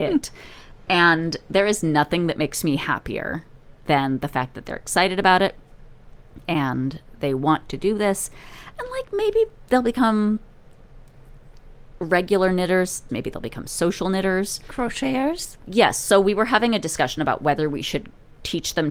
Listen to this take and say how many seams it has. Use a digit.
1